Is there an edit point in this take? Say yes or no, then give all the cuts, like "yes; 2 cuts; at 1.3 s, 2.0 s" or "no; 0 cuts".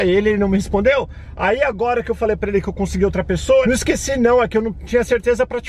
yes; 1 cut; at 3.6 s